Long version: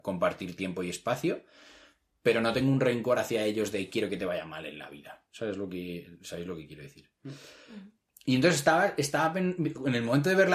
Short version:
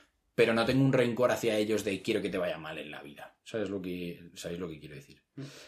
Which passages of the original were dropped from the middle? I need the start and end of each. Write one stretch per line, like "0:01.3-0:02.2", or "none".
none